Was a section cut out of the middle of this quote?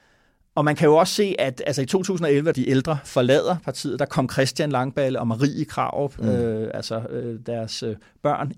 yes; 1 cut; at 2.5 s

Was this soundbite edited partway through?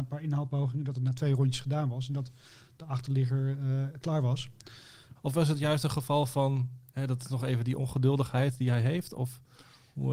yes; 1 cut; at 5.2 s

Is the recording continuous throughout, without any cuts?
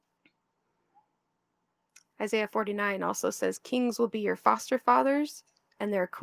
yes; 0 cuts

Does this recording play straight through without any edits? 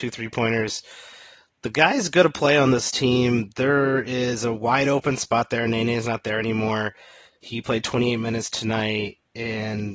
yes; 0 cuts

